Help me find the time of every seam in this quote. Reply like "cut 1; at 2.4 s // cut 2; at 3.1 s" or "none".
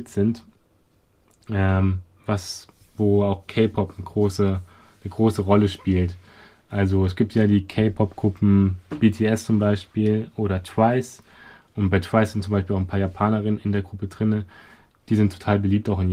none